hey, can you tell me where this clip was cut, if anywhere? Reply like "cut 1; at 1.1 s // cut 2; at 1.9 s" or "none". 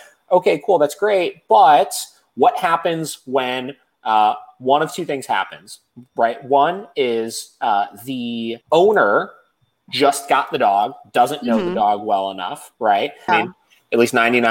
cut 1; at 8.6 s // cut 2; at 13.3 s

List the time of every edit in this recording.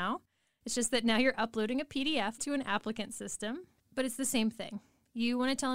cut 1; at 2.4 s

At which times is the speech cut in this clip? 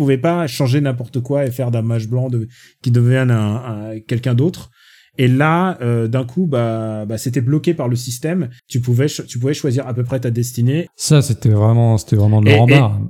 cut 1; at 8.6 s // cut 2; at 10.9 s

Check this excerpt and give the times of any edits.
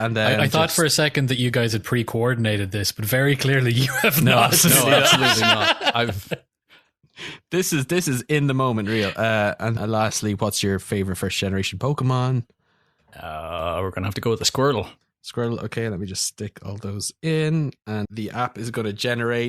cut 1; at 9.8 s // cut 2; at 18.0 s

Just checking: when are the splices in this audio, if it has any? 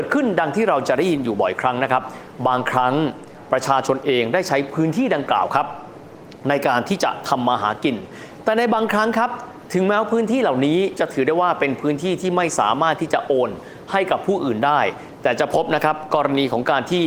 none

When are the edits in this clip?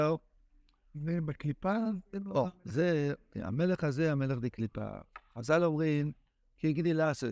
none

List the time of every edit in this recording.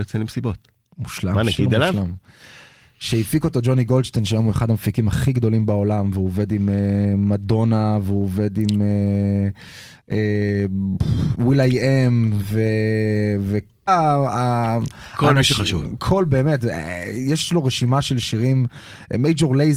cut 1; at 13.9 s

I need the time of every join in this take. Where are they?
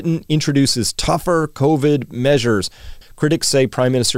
cut 1; at 3.0 s

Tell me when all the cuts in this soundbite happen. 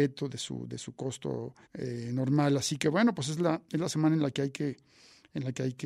cut 1; at 1.6 s

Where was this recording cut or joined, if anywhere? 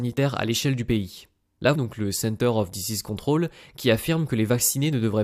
cut 1; at 1.7 s

